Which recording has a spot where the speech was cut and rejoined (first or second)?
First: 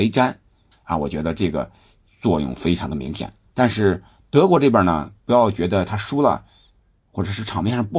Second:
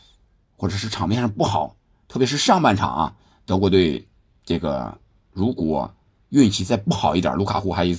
first